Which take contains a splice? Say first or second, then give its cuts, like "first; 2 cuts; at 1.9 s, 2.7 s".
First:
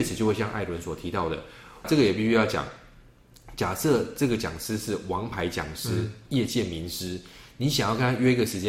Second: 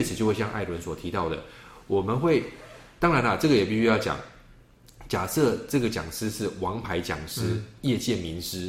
first; 1 cut; at 1.8 s